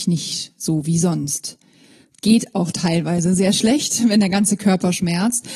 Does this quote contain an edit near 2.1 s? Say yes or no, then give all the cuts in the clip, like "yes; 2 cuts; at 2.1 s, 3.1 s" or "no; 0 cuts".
no; 0 cuts